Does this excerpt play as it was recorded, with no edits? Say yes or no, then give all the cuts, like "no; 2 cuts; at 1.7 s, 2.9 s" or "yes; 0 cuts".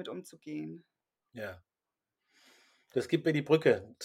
yes; 0 cuts